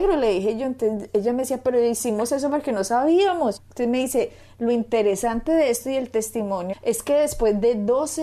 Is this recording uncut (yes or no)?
no